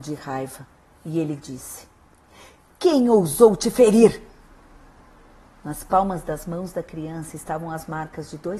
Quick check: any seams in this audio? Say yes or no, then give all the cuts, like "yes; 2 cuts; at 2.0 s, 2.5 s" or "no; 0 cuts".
no; 0 cuts